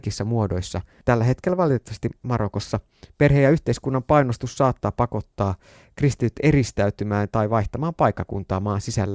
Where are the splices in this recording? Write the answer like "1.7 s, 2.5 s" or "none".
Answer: none